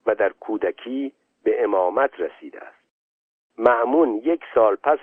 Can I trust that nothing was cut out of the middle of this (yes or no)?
yes